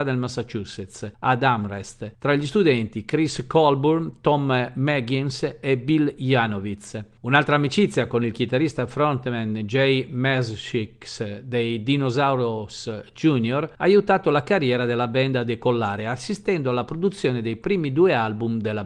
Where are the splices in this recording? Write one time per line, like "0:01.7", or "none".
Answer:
none